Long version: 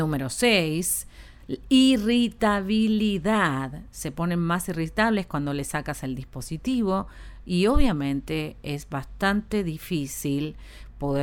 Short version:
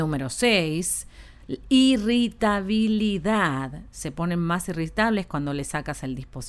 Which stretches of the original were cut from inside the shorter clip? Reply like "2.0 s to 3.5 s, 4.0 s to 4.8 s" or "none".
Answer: none